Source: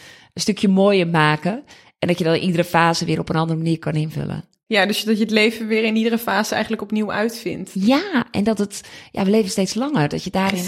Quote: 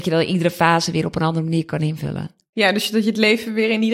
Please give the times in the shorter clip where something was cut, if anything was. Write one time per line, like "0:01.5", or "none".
none